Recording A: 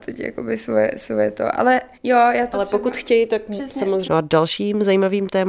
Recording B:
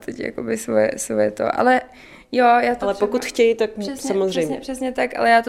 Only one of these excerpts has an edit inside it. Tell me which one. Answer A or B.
A